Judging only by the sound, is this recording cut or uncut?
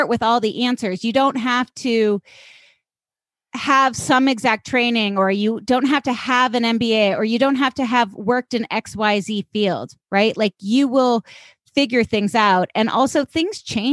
uncut